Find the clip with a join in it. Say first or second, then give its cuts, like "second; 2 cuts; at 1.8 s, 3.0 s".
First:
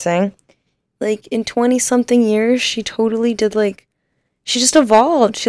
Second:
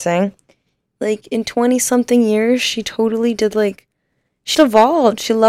second; 1 cut; at 4.5 s